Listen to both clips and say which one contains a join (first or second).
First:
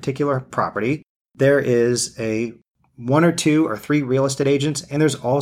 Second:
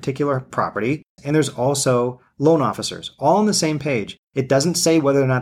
second